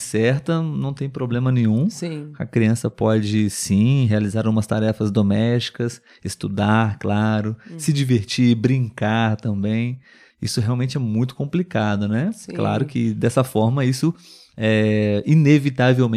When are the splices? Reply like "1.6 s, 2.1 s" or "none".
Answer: 10.3 s